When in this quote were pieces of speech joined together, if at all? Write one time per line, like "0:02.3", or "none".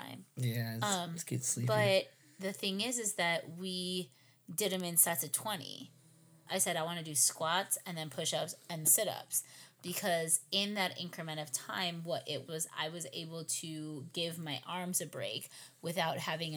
0:06.5
0:08.8
0:12.5